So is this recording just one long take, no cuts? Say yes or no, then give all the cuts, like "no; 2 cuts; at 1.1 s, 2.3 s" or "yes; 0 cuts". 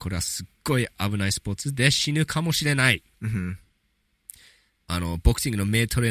yes; 0 cuts